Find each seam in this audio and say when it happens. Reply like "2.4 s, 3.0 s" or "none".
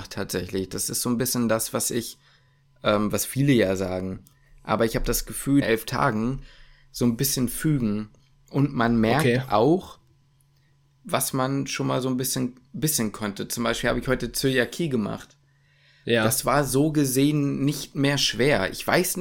5.6 s